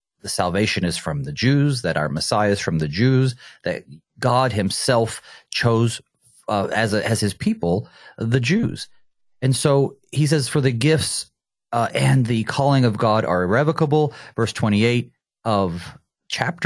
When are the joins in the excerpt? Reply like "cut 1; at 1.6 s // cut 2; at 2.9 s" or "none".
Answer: none